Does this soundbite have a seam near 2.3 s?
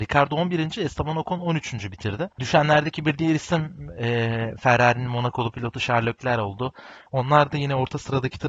yes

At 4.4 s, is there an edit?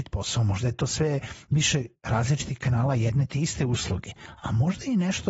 no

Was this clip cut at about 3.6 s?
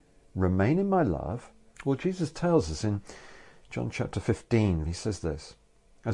no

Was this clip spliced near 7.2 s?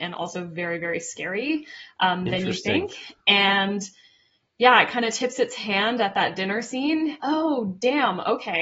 yes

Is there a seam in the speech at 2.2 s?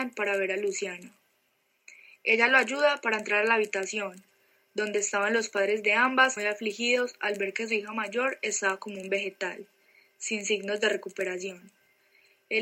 no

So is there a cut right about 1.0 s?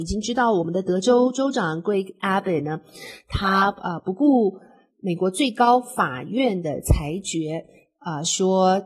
no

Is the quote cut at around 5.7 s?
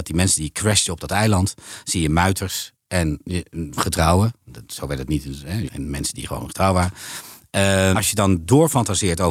yes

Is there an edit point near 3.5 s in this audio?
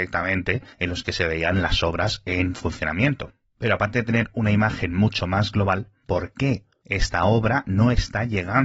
no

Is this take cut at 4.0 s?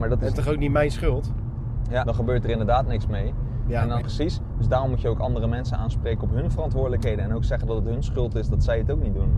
yes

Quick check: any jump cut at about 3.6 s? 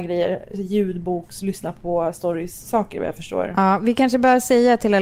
no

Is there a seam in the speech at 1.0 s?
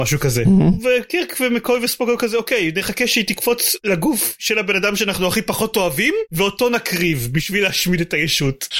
no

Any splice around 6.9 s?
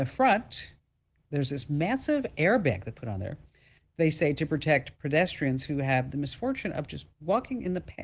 no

